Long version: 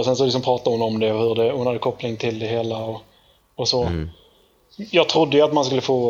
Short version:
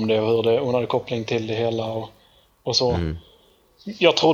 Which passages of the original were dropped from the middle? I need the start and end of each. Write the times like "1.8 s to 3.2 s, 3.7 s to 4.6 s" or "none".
none